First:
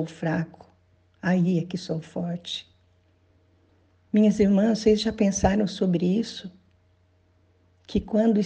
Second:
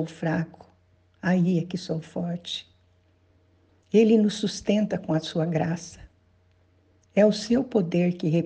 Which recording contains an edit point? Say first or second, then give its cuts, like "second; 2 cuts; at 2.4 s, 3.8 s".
second; 1 cut; at 3.8 s